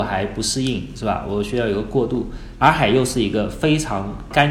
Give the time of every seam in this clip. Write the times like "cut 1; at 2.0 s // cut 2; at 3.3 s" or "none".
cut 1; at 2.6 s